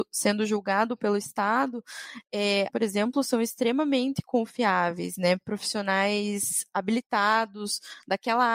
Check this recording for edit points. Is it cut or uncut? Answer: cut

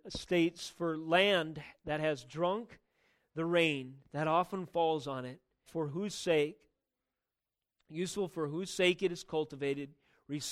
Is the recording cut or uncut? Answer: cut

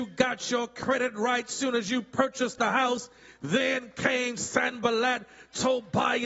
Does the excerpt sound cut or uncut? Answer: uncut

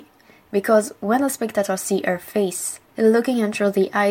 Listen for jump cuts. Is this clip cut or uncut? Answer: cut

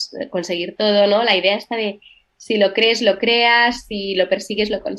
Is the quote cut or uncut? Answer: uncut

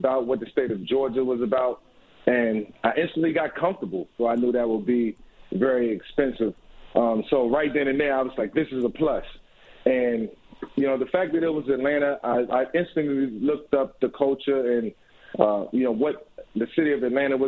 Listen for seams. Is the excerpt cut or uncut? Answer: cut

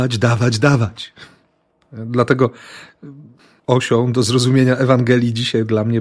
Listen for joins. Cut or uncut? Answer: cut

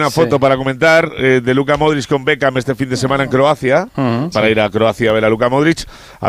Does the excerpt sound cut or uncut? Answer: cut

